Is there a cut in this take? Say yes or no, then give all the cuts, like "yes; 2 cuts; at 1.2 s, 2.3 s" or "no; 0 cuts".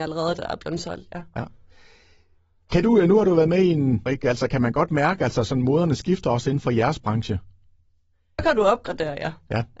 yes; 2 cuts; at 4.1 s, 8.4 s